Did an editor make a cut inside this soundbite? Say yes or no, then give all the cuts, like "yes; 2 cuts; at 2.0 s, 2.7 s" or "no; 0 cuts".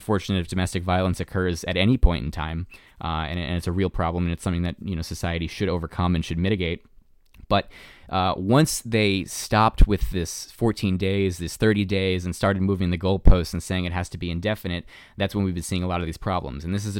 no; 0 cuts